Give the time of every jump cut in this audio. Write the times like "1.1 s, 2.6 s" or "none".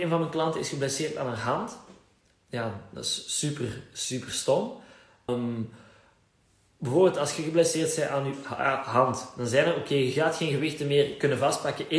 5.3 s